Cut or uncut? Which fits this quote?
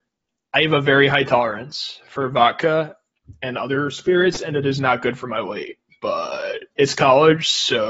uncut